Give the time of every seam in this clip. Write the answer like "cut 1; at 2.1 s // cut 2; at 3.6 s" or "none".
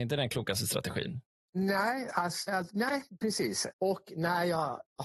cut 1; at 2.5 s // cut 2; at 3.7 s